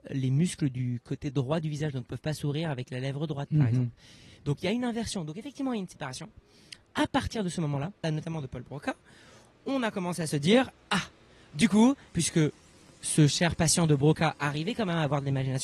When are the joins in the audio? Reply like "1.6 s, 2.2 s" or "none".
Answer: 8.0 s, 12.1 s